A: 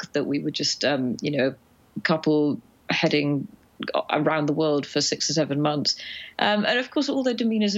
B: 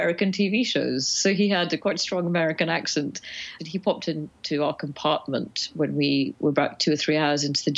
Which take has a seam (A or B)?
B